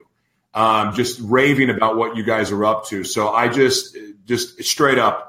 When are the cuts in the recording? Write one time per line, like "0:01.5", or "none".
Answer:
none